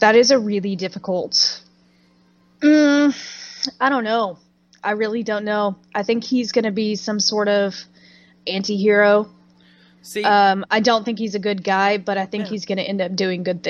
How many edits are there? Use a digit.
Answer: 0